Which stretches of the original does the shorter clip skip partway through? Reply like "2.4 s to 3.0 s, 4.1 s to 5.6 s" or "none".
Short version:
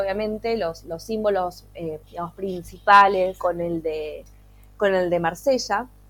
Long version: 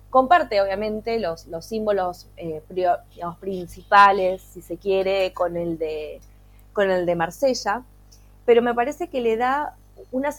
2.6 s to 3.1 s, 4.4 s to 5.3 s